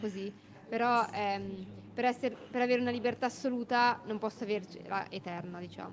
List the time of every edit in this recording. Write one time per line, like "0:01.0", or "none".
none